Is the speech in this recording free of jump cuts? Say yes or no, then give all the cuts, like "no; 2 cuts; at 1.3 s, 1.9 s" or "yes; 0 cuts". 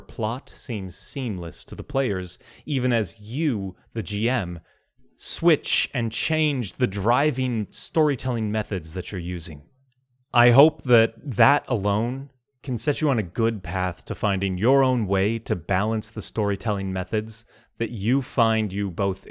yes; 0 cuts